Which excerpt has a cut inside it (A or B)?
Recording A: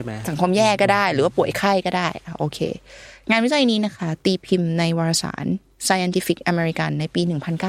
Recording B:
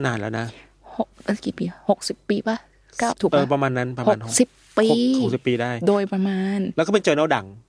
B